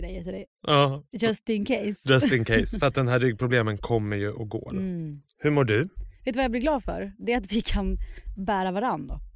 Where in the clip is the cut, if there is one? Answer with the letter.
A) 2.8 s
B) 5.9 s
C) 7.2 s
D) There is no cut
B